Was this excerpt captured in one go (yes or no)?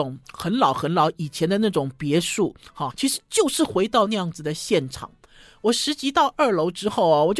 no